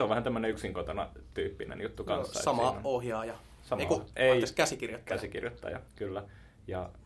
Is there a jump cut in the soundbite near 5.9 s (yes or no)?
yes